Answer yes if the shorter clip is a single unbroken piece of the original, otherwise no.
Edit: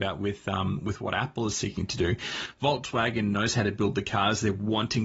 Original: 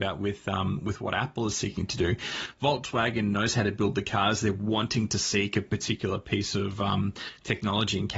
yes